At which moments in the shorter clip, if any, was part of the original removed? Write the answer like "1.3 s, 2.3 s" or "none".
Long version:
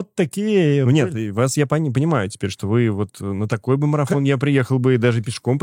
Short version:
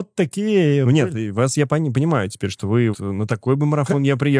2.9 s